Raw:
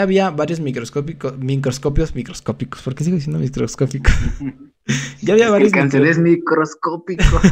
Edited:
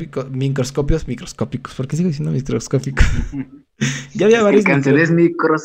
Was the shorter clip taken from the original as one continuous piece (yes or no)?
yes